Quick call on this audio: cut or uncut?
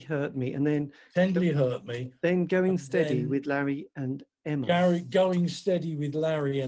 uncut